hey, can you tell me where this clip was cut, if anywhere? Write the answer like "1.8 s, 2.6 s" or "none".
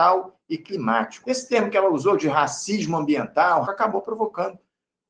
1.2 s, 3.6 s